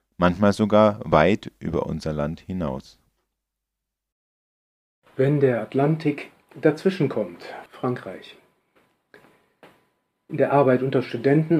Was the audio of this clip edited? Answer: yes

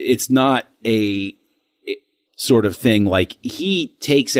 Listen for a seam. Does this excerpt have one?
yes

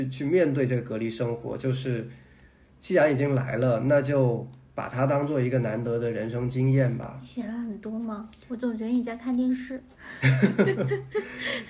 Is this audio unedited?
yes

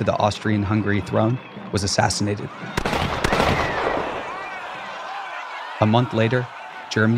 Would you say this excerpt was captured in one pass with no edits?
yes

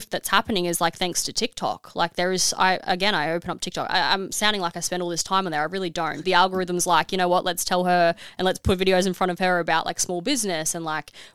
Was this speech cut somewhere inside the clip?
yes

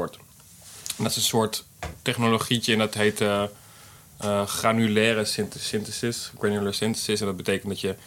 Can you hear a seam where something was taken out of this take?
no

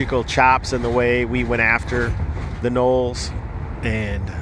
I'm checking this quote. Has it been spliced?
no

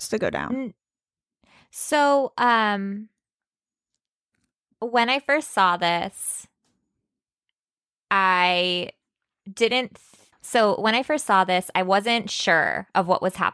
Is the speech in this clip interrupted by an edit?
yes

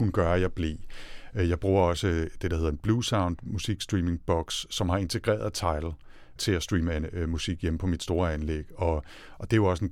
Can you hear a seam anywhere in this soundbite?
no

